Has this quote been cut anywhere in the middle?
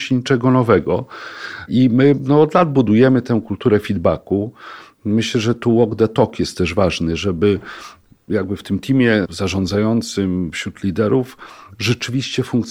no; 0 cuts

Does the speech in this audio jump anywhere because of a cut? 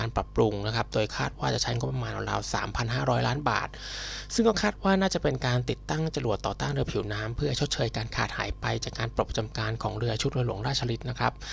no; 0 cuts

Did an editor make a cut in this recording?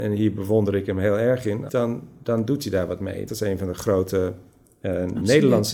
yes; 2 cuts; at 1.7 s, 3.3 s

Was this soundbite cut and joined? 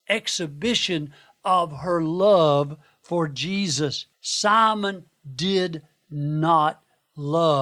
yes; 1 cut; at 4.1 s

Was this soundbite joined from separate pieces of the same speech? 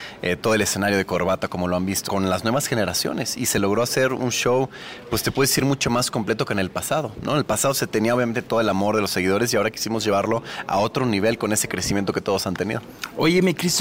yes; 1 cut; at 2.1 s

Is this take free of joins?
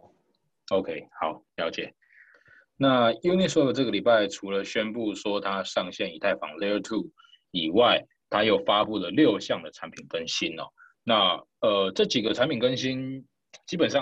yes; 0 cuts

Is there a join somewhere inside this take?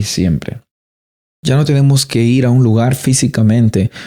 no; 0 cuts

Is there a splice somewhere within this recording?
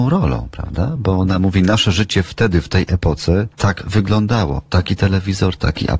no; 0 cuts

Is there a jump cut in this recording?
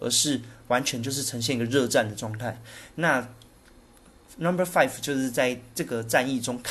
no; 0 cuts

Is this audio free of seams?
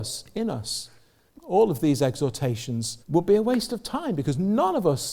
no; 2 cuts; at 1.3 s, 3.0 s

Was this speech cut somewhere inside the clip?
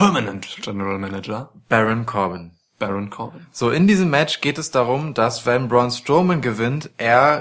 no; 0 cuts

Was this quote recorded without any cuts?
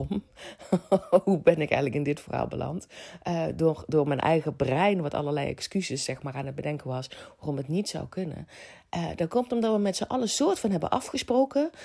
yes; 0 cuts

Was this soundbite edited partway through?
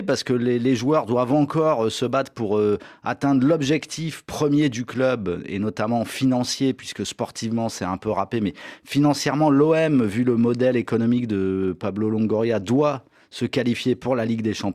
no; 0 cuts

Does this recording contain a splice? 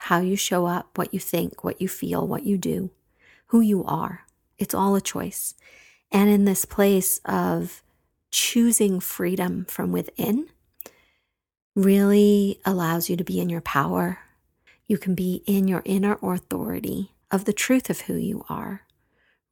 yes; 2 cuts; at 14.7 s, 17.2 s

